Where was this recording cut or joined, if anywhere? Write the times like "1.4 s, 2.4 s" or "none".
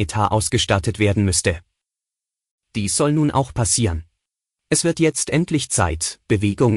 4.6 s